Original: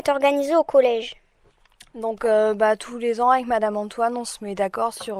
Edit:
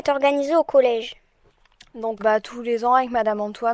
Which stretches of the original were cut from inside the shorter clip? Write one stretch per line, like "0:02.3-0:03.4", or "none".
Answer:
0:02.2-0:02.5

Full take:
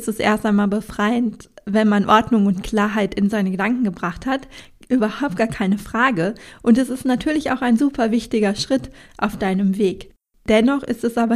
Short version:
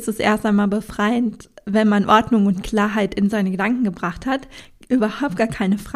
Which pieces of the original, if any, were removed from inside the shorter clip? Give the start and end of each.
none

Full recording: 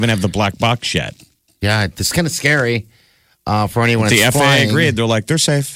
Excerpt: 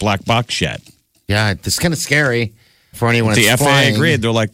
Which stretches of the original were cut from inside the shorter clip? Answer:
0:03.3-0:03.7

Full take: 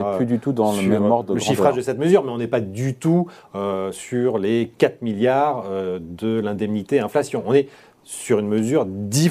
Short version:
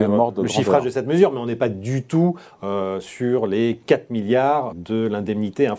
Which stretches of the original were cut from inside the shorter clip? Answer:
0:05.6-0:06.0

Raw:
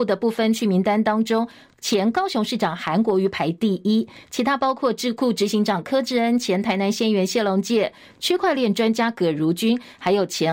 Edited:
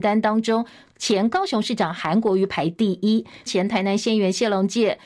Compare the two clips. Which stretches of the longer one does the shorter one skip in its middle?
0:04.3-0:06.4

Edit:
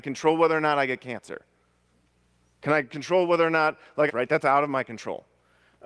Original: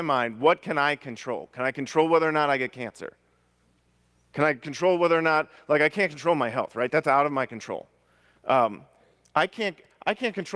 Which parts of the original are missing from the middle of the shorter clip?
0:05.8-0:06.7

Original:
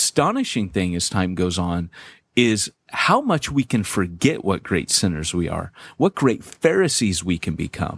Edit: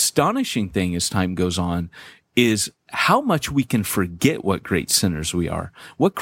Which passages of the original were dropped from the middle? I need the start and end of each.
none

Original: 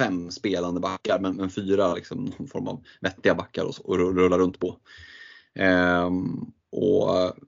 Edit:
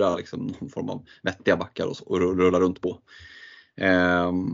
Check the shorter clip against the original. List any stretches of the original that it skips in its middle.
none

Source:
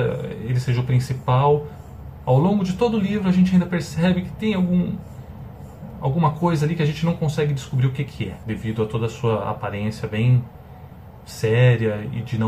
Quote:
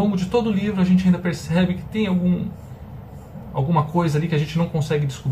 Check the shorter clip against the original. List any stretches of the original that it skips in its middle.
none

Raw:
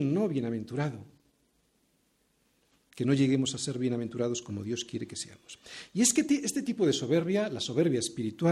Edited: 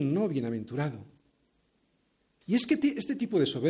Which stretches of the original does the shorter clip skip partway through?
0:02.4-0:05.9

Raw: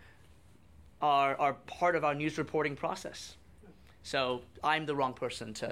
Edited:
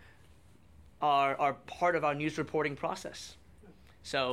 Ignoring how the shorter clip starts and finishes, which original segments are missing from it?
none

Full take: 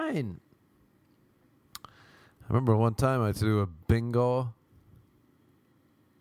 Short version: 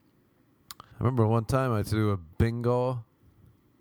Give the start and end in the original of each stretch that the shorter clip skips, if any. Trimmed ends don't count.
0:02.0-0:02.4

